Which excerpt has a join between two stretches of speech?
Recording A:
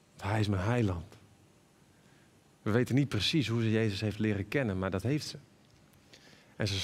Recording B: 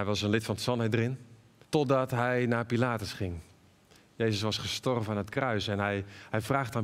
B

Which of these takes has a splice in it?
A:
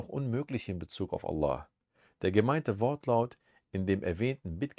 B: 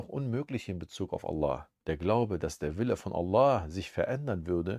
B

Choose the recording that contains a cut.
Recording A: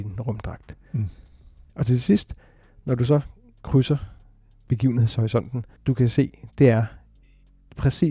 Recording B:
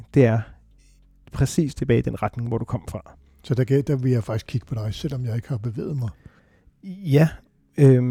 A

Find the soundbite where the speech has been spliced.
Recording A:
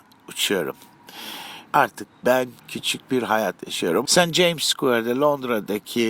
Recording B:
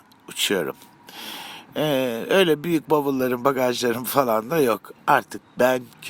A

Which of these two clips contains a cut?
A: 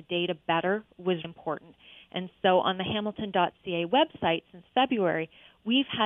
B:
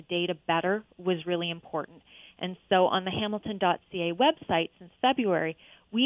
A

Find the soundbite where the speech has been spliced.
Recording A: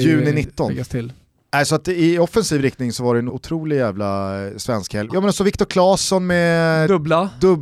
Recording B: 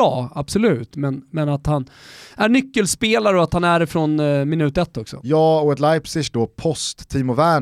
A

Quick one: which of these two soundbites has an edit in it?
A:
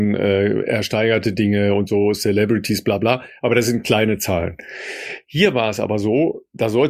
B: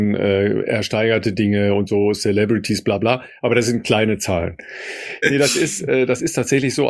B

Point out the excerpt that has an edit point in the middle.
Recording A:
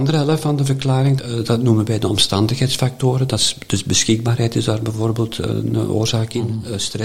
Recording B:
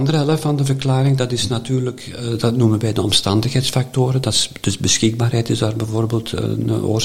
A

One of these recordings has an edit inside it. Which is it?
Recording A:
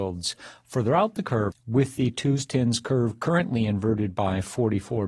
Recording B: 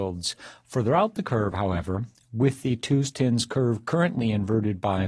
A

